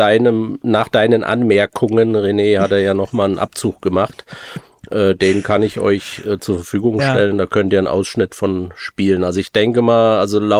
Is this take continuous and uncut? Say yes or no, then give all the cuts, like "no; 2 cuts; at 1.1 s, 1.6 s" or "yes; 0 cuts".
yes; 0 cuts